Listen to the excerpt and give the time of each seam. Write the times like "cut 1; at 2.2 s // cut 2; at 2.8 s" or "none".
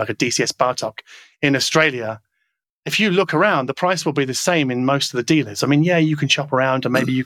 none